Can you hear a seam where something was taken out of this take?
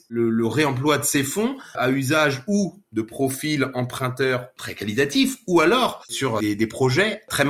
yes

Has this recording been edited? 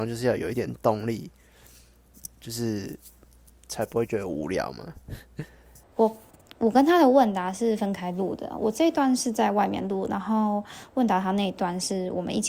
yes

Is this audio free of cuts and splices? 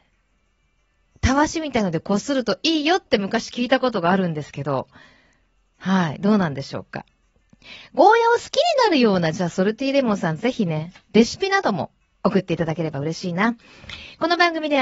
yes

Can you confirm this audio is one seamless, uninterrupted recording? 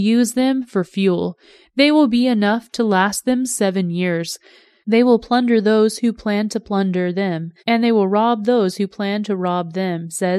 no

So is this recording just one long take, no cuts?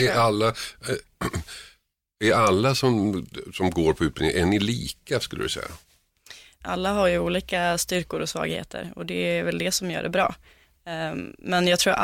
no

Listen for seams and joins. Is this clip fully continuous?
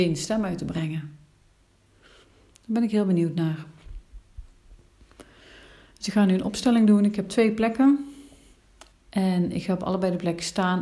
no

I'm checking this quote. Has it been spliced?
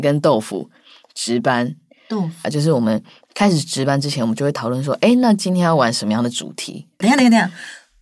yes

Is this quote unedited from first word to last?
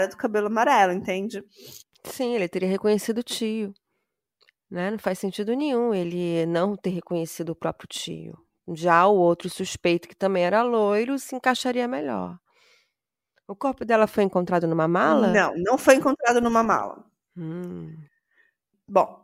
yes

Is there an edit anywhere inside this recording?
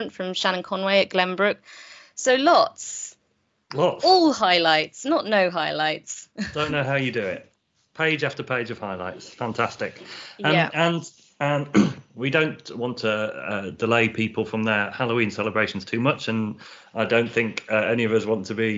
no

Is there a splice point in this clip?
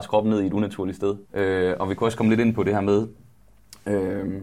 yes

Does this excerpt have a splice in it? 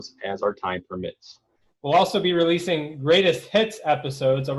yes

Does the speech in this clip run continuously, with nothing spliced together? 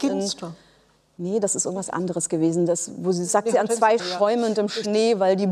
no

